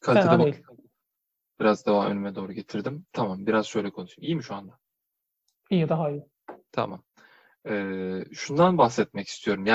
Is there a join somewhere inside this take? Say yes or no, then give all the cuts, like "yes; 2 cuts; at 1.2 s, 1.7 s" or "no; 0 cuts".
no; 0 cuts